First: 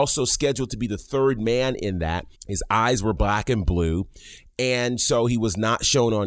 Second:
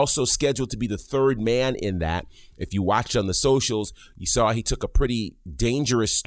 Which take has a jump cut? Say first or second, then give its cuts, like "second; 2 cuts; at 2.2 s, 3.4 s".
first; 1 cut; at 2.3 s